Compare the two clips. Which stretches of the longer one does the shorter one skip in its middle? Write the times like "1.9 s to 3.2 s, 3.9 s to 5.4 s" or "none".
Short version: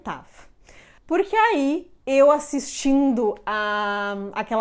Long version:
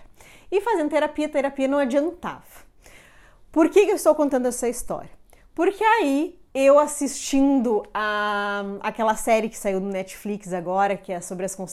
3.2 s to 5.5 s